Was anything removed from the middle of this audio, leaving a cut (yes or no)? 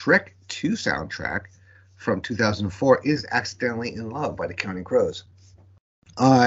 no